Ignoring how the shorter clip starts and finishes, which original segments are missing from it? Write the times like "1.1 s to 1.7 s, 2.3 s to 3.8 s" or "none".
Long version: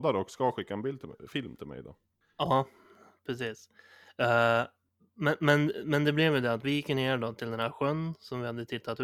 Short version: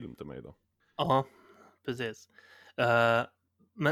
none

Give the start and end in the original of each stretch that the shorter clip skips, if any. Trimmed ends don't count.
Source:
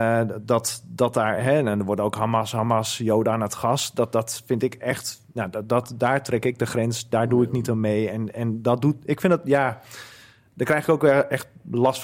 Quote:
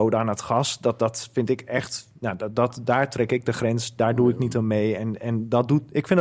none

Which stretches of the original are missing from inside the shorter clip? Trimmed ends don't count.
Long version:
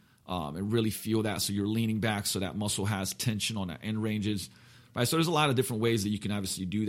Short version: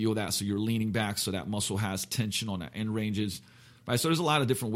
none

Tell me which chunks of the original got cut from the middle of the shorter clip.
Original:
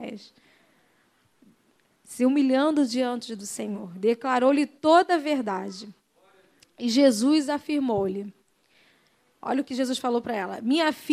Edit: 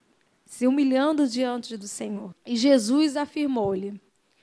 3.9 s to 6.6 s

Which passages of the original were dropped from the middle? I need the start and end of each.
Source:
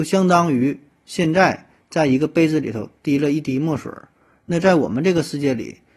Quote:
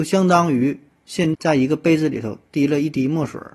1.3 s to 1.8 s

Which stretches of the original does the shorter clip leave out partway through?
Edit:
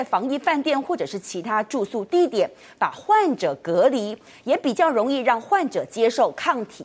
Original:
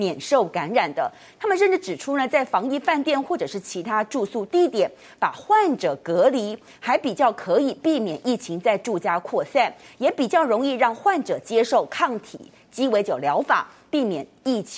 6.7 s to 9.9 s

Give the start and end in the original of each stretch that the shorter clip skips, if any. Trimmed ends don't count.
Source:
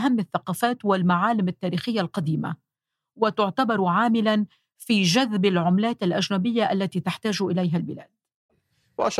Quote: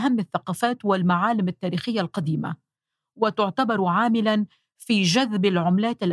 none

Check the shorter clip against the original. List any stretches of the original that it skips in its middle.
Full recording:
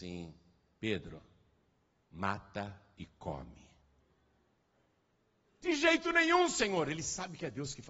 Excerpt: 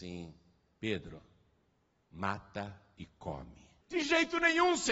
3.8 s to 5.5 s

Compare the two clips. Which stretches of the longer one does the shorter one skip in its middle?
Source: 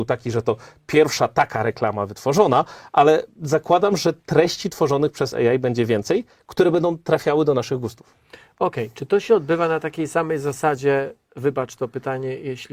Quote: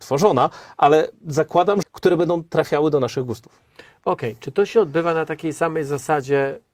4.0 s to 6.4 s

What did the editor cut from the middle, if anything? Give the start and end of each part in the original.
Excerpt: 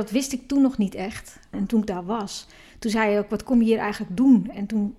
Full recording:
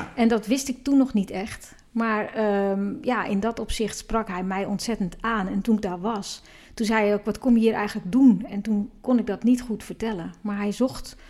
1.9 s to 5.5 s

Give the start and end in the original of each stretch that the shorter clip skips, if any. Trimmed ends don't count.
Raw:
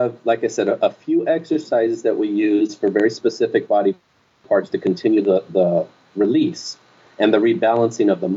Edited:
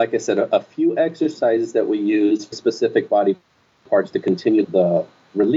2.8 s to 3.1 s, 5.2 s to 5.5 s

